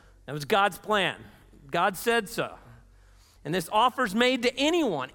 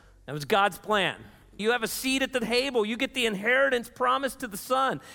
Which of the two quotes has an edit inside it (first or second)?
second